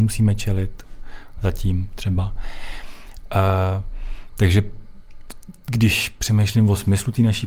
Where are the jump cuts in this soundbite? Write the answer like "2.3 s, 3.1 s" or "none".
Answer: none